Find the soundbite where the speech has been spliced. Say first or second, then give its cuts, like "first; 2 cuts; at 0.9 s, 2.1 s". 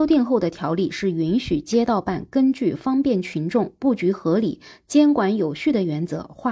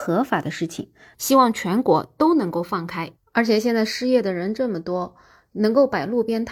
second; 1 cut; at 1.1 s